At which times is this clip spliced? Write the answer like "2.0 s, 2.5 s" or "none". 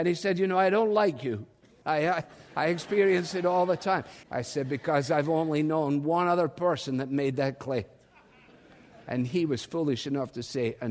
1.8 s, 4.2 s